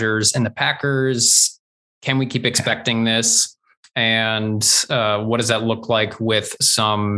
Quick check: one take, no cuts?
yes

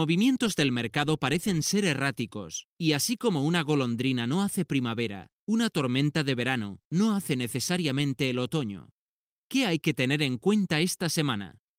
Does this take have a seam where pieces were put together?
no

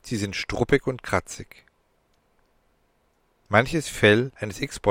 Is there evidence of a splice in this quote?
no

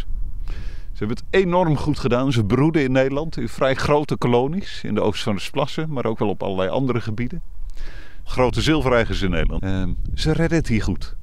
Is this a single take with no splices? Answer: no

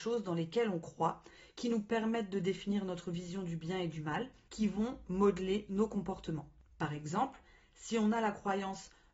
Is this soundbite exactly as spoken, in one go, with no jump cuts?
no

